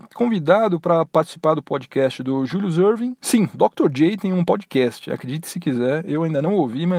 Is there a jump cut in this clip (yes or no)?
no